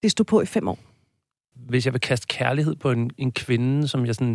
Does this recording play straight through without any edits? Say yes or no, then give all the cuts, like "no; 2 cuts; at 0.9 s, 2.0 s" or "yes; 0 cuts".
no; 1 cut; at 1.5 s